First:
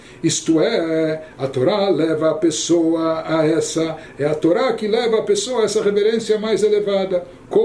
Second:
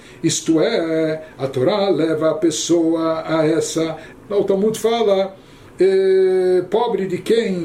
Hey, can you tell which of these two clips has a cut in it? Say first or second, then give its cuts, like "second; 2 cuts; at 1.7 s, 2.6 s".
second; 1 cut; at 4.1 s